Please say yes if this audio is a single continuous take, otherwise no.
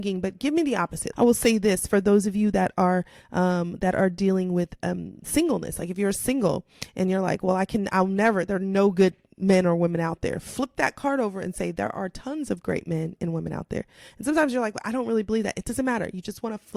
no